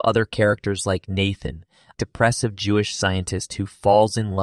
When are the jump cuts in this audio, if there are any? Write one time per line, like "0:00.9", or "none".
0:02.0